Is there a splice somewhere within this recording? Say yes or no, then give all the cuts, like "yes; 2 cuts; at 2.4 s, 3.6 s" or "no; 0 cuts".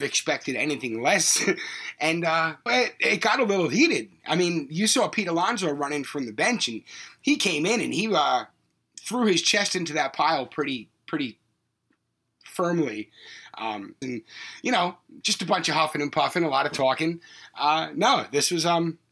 yes; 3 cuts; at 2.7 s, 14.0 s, 15.2 s